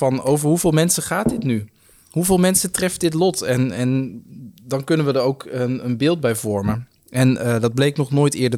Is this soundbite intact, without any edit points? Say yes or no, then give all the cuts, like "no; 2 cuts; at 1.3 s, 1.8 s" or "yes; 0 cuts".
yes; 0 cuts